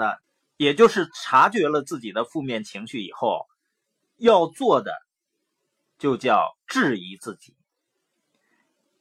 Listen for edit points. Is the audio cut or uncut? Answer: uncut